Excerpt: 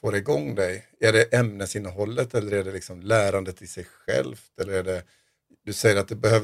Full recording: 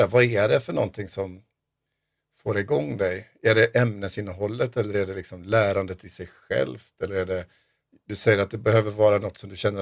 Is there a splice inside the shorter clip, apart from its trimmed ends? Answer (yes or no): no